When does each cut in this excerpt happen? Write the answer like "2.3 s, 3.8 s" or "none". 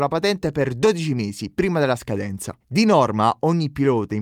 2.6 s